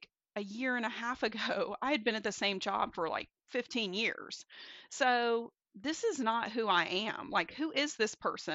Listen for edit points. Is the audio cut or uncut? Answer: uncut